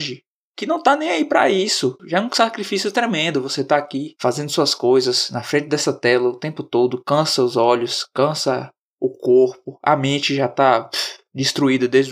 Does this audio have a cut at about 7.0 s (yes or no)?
no